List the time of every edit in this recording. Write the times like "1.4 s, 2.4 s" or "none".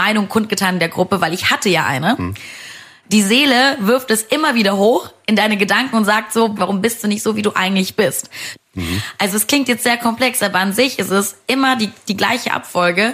3.0 s, 6.6 s, 8.6 s